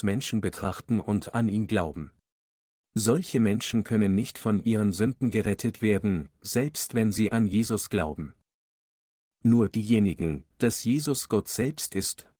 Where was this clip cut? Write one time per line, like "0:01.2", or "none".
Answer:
0:02.8
0:10.5